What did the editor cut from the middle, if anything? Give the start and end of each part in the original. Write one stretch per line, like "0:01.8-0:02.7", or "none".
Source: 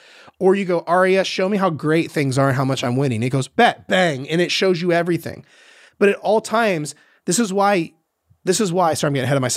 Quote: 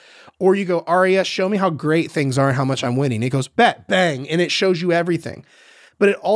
none

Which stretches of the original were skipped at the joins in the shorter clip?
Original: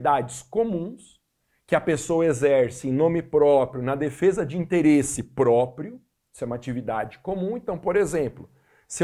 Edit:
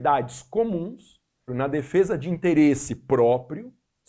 0:01.5-0:03.8

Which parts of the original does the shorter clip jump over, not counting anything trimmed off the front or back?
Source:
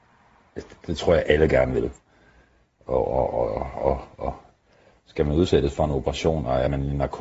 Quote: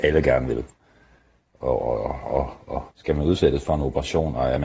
0:03.1-0:03.3
0:04.4-0:05.0

